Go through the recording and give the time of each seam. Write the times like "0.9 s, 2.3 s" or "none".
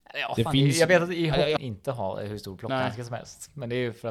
1.6 s